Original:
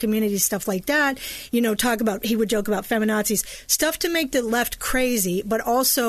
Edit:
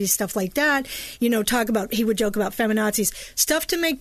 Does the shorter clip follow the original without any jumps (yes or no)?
yes